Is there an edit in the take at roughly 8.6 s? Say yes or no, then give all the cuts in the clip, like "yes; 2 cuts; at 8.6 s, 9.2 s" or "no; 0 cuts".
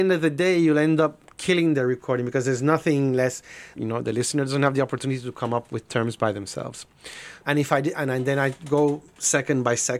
no; 3 cuts; at 3.7 s, 5.7 s, 7.4 s